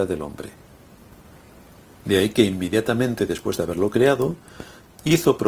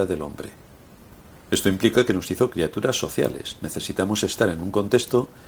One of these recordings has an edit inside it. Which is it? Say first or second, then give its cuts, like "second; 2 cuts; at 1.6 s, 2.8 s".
second; 1 cut; at 1.5 s